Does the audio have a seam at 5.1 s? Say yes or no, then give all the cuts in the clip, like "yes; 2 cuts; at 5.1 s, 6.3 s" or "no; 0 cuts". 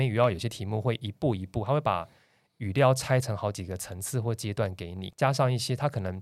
yes; 1 cut; at 5.1 s